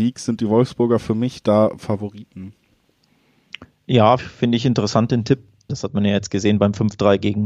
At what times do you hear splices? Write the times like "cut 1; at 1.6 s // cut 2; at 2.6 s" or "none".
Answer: cut 1; at 4.2 s // cut 2; at 5.7 s